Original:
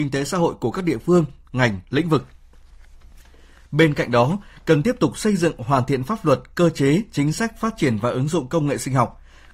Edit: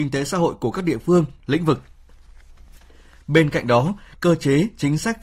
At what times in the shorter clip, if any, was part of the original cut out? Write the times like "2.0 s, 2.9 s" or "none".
1.4 s, 4.1 s